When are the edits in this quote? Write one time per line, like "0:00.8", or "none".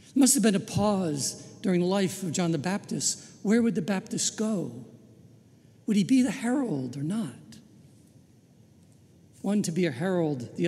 0:09.3